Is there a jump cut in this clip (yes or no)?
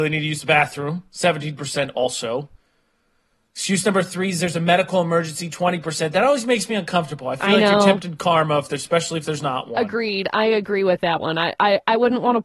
no